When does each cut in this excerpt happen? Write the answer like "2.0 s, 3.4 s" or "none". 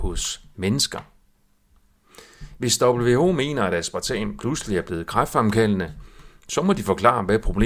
none